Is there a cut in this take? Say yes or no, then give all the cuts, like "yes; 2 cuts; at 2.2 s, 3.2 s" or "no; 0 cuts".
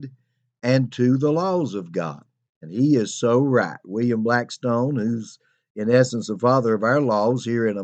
yes; 1 cut; at 2.5 s